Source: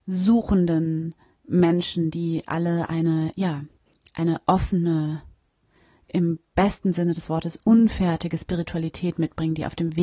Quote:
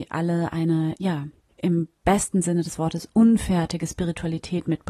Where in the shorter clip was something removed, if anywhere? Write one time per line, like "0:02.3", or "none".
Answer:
0:01.5